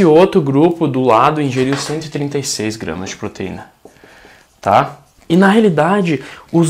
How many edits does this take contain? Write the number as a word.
one